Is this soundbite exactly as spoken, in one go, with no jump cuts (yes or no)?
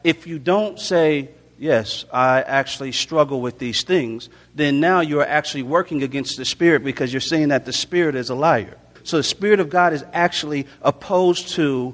no